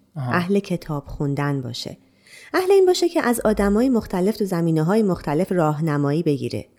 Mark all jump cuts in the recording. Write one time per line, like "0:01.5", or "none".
none